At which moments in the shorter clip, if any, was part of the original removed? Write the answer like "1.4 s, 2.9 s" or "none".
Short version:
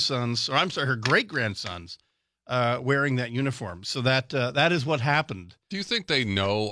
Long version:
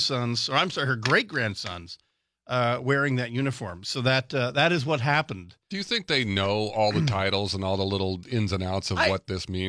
none